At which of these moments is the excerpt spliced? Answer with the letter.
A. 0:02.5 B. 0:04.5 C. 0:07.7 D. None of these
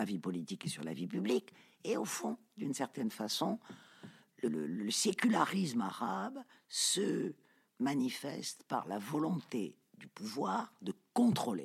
B